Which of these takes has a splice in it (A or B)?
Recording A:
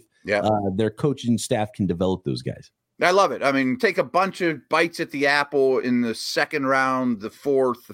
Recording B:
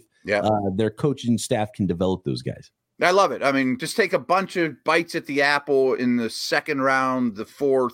A